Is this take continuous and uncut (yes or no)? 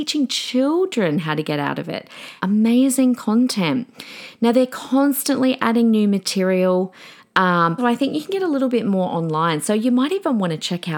no